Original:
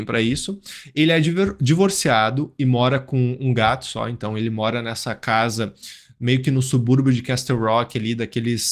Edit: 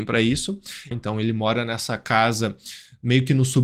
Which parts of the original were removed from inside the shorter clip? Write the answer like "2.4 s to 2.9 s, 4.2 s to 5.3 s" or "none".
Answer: 0.9 s to 4.1 s

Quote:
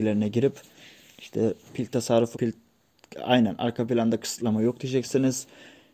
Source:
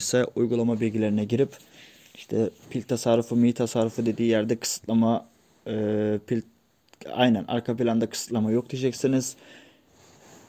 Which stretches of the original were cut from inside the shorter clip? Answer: 3.3 s to 6.2 s

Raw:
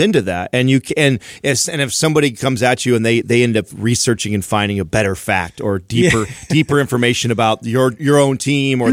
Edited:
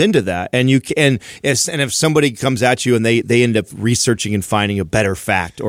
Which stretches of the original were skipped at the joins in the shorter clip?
none

